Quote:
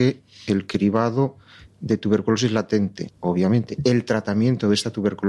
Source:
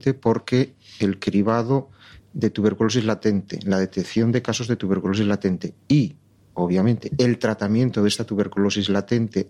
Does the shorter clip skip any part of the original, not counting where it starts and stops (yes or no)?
yes